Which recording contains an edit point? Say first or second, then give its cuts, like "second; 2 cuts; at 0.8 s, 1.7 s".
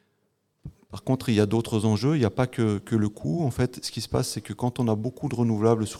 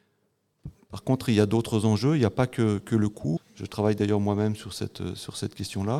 second; 1 cut; at 3.4 s